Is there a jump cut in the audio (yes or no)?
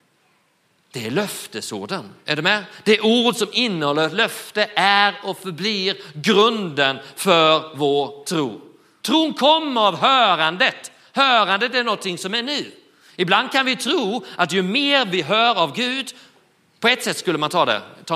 yes